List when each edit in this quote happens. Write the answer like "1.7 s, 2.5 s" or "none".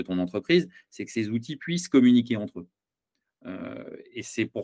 none